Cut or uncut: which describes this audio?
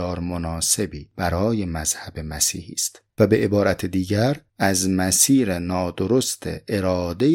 cut